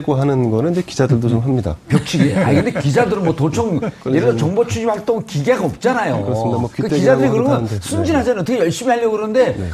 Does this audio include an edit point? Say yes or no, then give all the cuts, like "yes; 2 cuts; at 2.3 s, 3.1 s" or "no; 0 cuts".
no; 0 cuts